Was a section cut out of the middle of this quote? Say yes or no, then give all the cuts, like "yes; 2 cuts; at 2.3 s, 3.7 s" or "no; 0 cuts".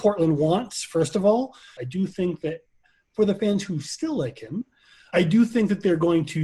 yes; 1 cut; at 1.8 s